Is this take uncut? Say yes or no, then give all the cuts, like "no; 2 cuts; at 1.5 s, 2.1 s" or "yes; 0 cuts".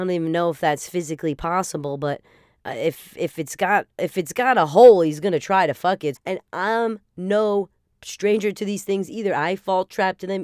no; 1 cut; at 6.2 s